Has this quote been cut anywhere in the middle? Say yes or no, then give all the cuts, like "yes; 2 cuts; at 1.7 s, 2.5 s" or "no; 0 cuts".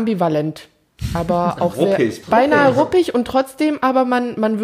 yes; 1 cut; at 2.2 s